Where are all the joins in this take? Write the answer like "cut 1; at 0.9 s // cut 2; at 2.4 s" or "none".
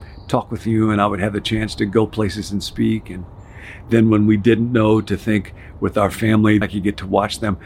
cut 1; at 6.6 s